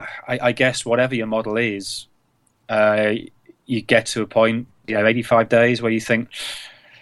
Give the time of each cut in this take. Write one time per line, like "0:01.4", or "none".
0:04.8